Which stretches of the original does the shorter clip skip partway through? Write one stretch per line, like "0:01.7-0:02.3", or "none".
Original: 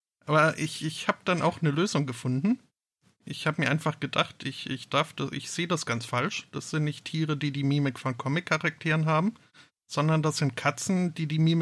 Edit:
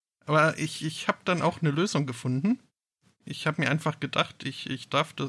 none